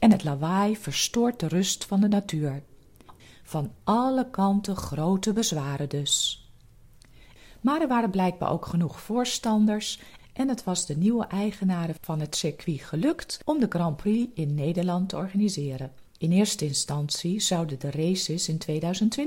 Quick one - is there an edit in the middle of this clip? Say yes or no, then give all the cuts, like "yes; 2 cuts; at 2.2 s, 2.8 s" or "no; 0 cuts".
yes; 2 cuts; at 3.2 s, 16.1 s